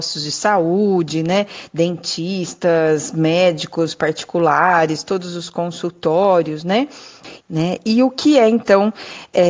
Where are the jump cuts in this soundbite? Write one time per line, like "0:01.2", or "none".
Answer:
0:07.4